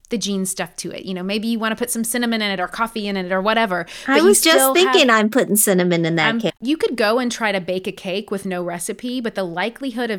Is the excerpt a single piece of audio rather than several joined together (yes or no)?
no